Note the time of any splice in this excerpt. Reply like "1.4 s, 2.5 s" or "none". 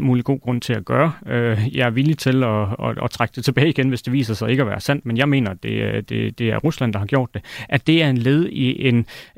none